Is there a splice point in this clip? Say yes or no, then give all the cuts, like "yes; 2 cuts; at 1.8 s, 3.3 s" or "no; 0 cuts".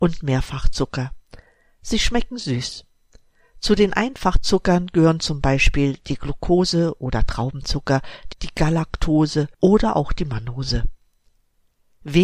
yes; 2 cuts; at 8.3 s, 9.5 s